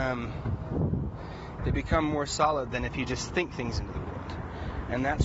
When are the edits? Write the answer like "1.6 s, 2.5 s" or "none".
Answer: 1.6 s